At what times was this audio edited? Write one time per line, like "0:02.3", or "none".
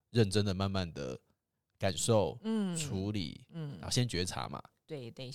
none